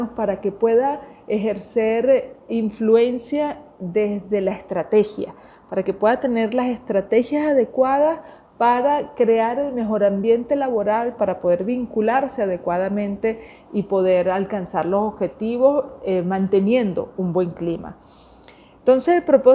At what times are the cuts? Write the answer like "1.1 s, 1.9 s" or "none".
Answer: 11.2 s

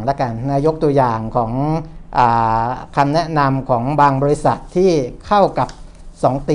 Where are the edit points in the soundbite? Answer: none

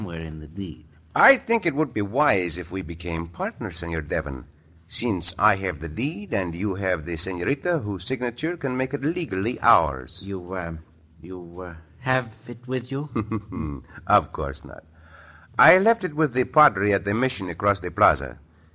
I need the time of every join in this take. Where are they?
none

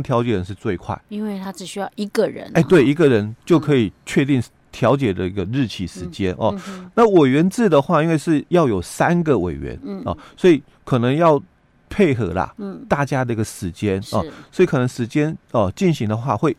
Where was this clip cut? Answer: none

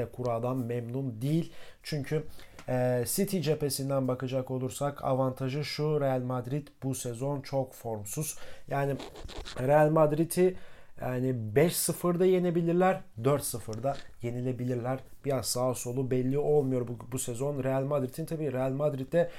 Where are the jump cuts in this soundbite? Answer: none

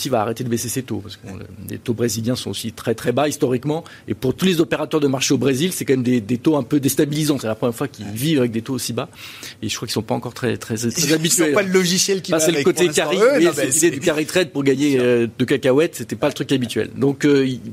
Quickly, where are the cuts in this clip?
7.4 s

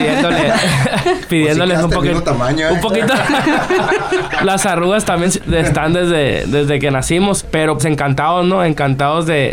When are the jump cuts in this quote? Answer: 5.2 s, 7.8 s

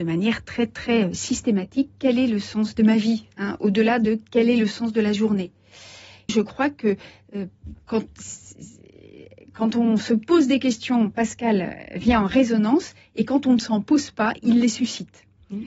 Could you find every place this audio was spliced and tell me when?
6.3 s

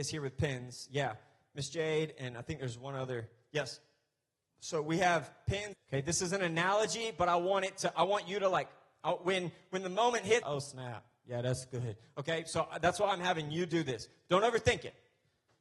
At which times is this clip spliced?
5.7 s, 10.4 s

